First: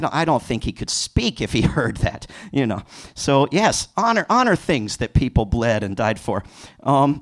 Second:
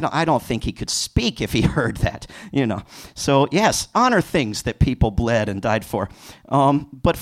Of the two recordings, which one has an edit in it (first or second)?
second